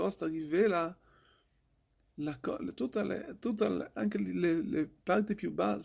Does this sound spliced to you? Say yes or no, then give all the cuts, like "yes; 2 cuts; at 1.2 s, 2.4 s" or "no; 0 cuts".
no; 0 cuts